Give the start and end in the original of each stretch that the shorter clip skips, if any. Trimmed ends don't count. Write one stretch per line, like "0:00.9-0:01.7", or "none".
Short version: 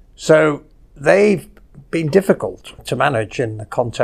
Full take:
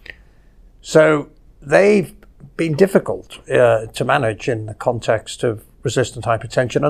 0:03.4-0:03.9